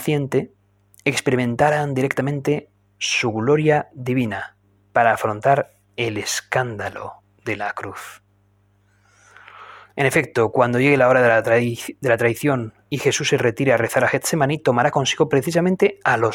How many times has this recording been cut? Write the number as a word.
one